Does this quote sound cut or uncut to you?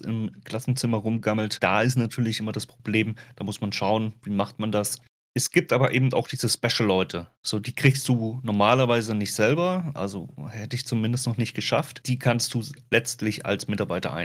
uncut